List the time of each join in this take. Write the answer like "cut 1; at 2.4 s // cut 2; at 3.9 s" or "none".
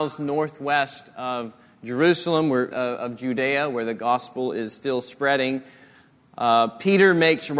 cut 1; at 2.7 s